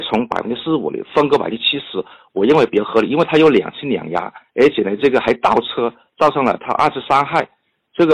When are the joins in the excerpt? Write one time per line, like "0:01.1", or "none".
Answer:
0:04.5